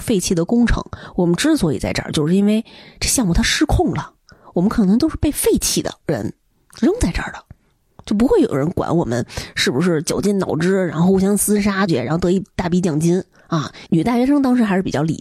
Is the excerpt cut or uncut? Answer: cut